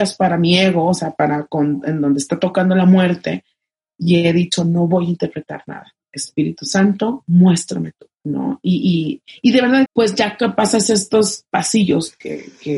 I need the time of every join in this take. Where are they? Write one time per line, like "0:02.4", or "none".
0:08.1
0:09.9